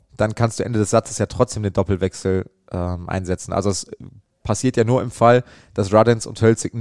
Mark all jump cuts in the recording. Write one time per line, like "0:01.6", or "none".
none